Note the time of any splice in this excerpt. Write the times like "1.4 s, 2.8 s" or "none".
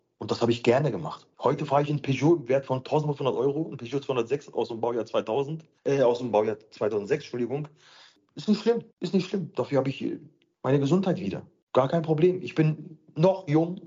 8.9 s